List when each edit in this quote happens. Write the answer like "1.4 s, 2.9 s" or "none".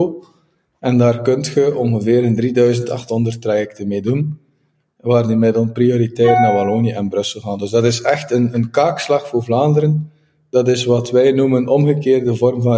none

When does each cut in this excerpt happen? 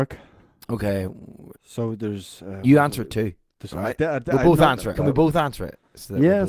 1.5 s, 4.9 s

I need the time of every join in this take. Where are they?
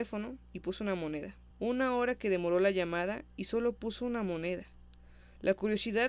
1.5 s

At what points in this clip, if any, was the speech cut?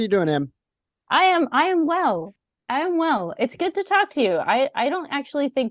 none

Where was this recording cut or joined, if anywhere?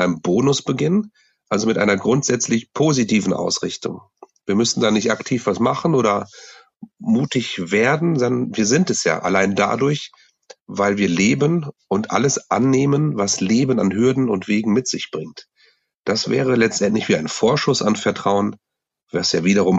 none

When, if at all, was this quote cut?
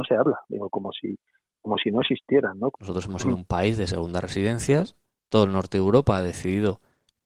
2.7 s

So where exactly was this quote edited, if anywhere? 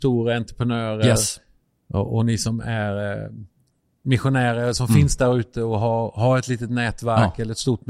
none

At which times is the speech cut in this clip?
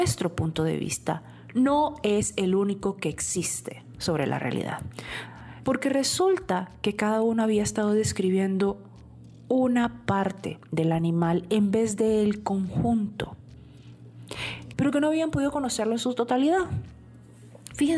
5.6 s, 14.7 s

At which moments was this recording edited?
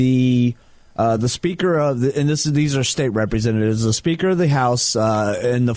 none

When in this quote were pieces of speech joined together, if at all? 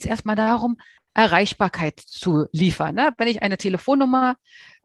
1.0 s

